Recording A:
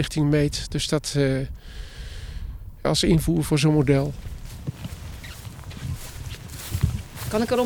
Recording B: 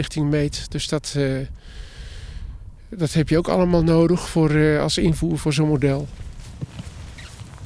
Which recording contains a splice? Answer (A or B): A